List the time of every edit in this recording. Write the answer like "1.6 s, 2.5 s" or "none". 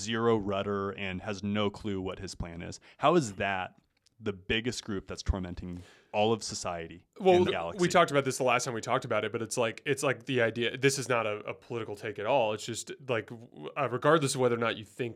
7.5 s